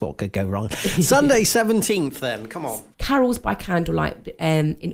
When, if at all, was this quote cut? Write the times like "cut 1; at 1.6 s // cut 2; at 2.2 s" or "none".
cut 1; at 2.9 s